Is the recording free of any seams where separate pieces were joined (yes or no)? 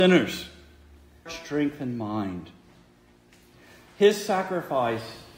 no